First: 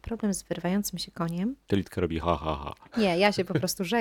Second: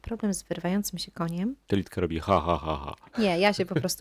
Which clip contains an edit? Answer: first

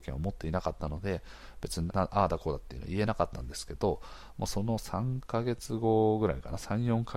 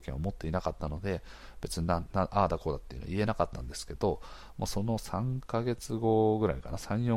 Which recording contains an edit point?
first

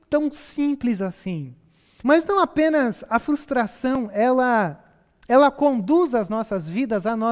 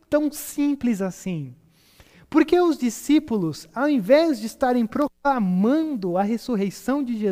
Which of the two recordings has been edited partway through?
first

